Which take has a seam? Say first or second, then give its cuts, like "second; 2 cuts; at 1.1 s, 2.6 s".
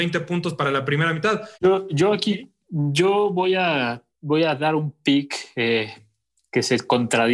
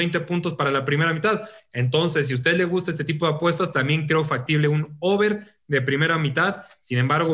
first; 2 cuts; at 1.5 s, 4.1 s